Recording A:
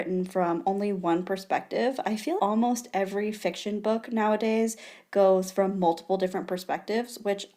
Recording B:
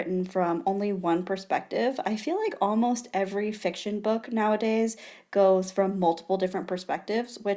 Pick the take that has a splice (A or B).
A